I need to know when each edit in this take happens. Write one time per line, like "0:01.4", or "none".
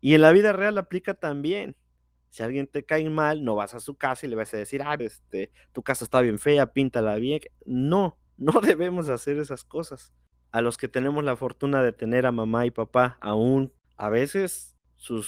0:05.0
0:08.3
0:10.3